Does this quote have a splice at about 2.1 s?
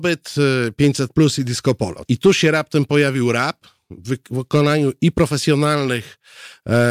yes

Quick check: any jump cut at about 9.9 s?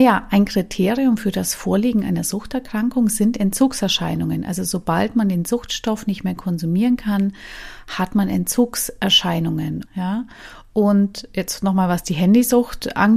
yes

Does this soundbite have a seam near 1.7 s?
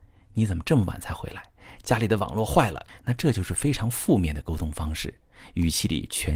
no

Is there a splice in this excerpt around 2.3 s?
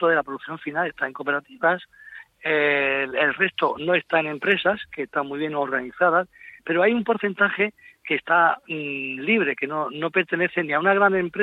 no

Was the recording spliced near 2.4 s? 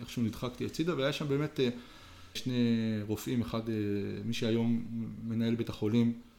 yes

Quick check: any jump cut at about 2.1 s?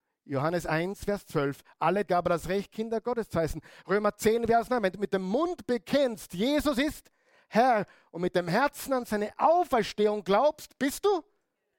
yes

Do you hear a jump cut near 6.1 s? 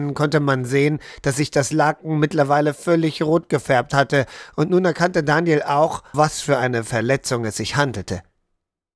yes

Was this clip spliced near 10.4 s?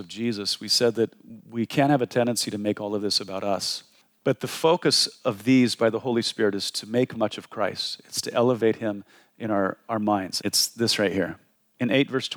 yes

